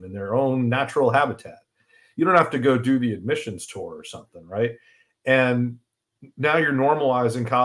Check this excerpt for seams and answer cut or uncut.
uncut